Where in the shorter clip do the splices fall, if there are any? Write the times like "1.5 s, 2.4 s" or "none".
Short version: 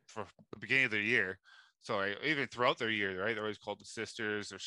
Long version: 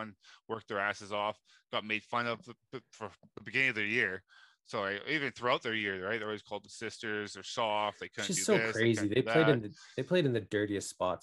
none